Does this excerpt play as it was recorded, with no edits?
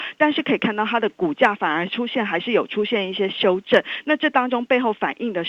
yes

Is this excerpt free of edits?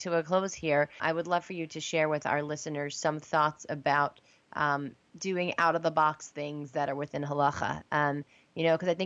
no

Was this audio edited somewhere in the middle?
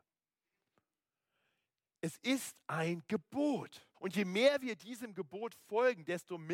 yes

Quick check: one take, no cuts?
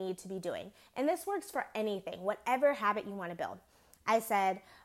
yes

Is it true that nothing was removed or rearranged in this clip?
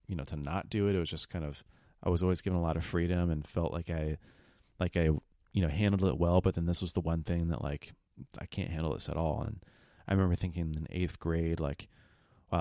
yes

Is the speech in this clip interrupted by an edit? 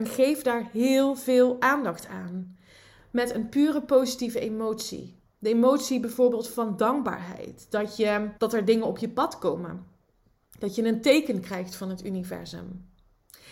yes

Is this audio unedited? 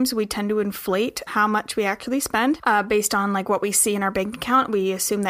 no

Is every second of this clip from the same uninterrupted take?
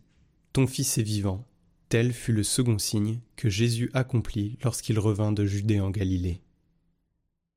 no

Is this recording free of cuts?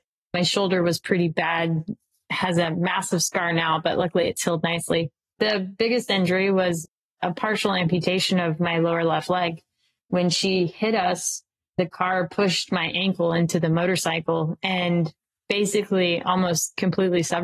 yes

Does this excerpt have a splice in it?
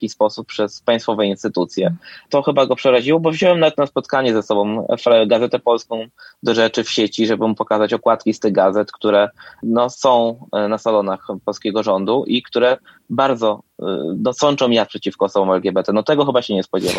no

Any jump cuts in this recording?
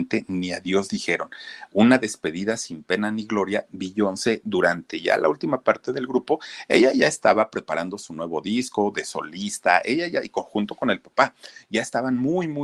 no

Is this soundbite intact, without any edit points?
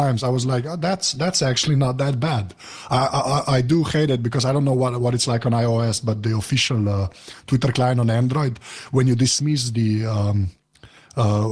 yes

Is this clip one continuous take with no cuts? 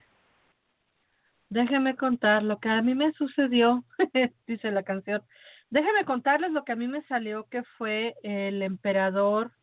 yes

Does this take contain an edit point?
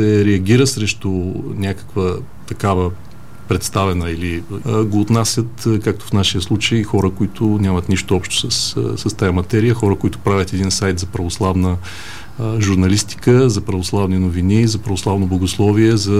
yes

